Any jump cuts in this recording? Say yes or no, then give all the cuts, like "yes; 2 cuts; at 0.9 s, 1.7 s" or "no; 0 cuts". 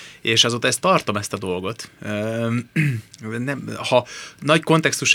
no; 0 cuts